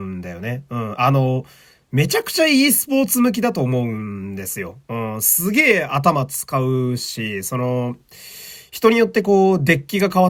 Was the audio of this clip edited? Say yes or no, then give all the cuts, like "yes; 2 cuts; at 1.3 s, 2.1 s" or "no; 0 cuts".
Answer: no; 0 cuts